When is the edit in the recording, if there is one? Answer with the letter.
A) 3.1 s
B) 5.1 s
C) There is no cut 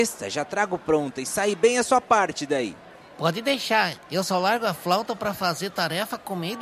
C